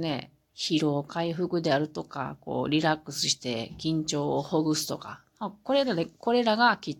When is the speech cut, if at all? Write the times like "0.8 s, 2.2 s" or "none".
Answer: none